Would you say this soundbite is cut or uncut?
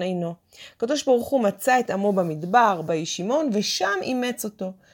cut